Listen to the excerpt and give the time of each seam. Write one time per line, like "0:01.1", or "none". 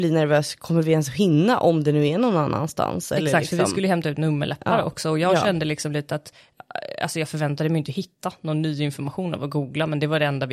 none